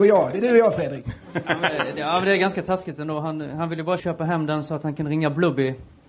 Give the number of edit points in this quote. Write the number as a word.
one